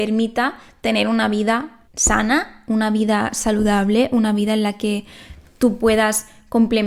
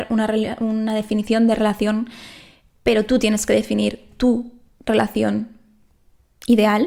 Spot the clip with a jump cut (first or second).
first